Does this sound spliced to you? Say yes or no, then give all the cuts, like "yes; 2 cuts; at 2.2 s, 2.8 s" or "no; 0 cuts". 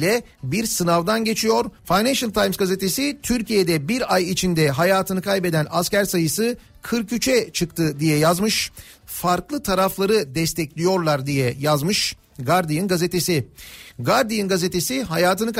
yes; 3 cuts; at 1.8 s, 9.0 s, 13.9 s